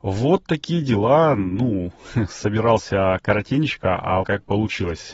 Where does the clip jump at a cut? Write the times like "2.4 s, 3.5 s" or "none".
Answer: 4.2 s